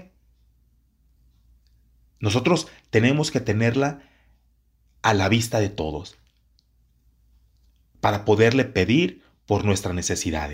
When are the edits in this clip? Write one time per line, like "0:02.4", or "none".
none